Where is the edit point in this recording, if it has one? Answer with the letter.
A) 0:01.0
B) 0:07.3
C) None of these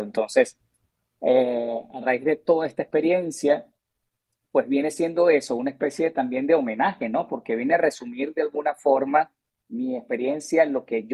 C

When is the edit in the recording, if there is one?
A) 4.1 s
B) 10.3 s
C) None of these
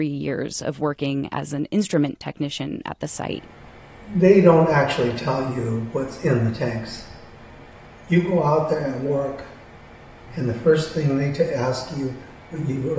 B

